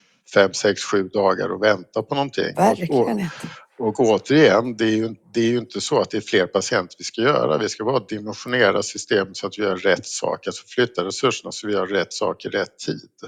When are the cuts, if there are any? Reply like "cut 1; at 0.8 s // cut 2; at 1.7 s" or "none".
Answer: none